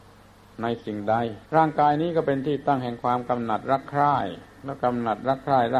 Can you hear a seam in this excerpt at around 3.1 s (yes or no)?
no